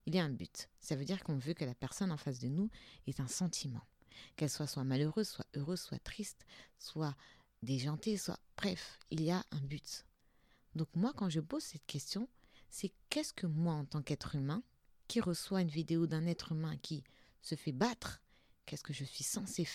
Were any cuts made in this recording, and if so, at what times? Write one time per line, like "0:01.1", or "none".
none